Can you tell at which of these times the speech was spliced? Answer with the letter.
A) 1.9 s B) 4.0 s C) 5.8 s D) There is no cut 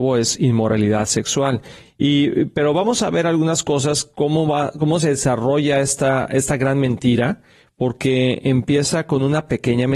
A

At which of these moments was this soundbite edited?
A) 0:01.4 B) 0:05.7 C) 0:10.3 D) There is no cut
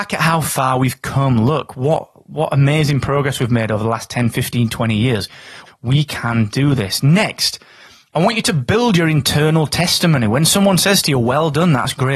B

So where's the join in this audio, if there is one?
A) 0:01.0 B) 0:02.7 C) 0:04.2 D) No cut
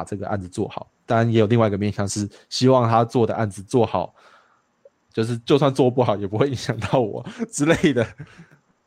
D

